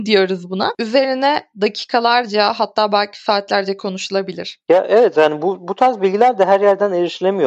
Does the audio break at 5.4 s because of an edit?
no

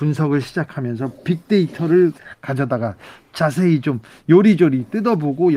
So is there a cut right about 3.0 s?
no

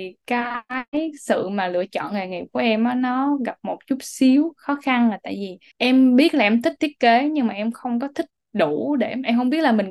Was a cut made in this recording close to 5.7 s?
yes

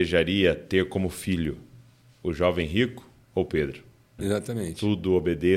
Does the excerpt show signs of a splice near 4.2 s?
yes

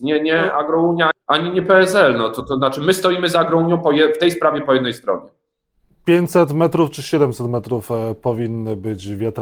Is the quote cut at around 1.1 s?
yes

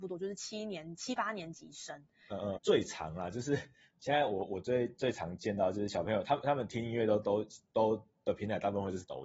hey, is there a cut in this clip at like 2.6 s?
yes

